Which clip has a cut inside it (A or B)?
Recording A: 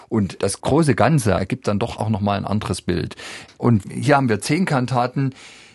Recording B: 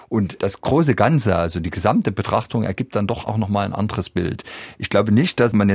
A